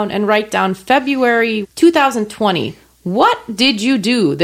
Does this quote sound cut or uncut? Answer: cut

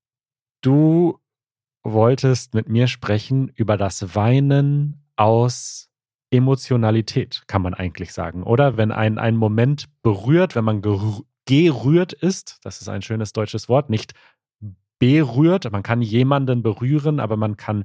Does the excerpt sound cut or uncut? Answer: uncut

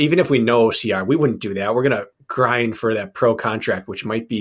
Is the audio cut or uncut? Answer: uncut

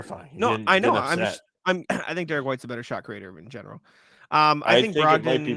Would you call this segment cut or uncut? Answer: cut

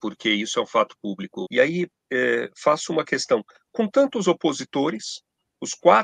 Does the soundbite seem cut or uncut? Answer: cut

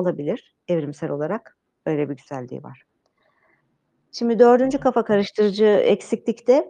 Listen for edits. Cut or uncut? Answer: cut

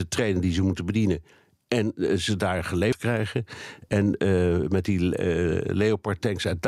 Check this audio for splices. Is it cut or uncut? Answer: uncut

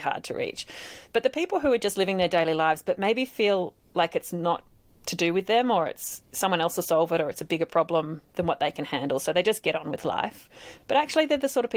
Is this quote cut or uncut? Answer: uncut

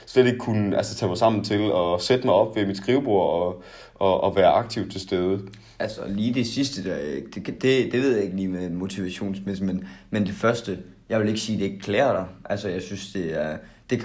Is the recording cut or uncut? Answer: uncut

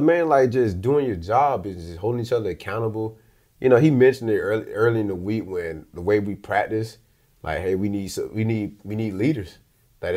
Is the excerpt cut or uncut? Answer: uncut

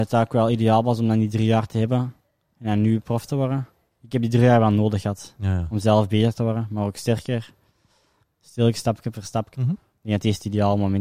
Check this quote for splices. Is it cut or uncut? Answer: cut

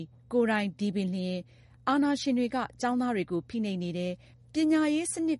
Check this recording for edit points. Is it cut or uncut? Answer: uncut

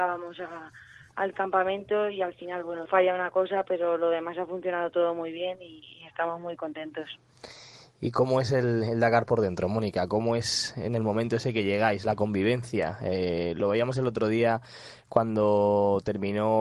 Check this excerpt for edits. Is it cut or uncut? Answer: cut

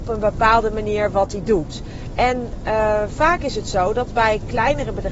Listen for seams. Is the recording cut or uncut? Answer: uncut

